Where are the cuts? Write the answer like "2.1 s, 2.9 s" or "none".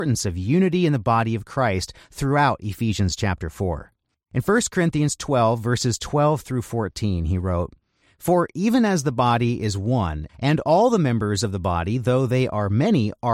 4.1 s, 10.3 s